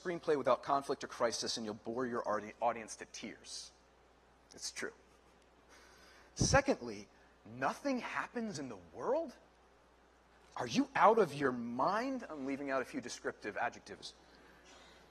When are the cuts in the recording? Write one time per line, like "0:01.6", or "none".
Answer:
none

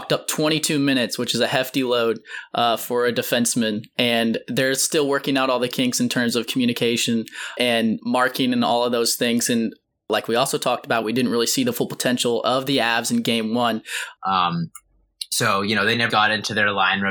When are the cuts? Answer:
0:14.2
0:16.1

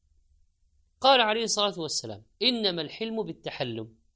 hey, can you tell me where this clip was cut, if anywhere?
0:01.0
0:02.3

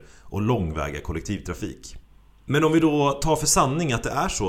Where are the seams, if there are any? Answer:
none

